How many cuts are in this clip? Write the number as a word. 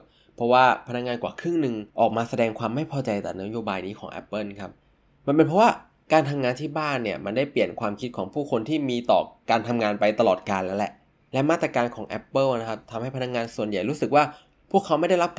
one